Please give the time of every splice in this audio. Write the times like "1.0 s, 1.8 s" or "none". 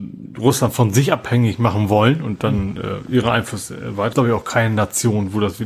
4.1 s